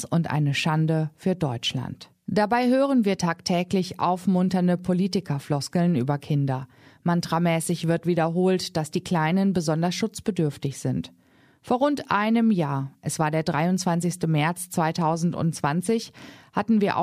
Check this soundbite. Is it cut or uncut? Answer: uncut